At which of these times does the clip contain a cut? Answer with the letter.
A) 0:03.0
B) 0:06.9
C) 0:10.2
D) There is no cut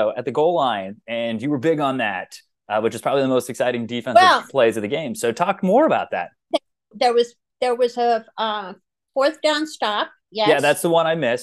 B